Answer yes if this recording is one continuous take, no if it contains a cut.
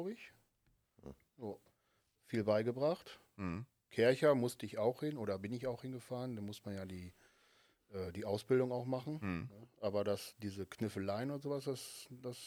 yes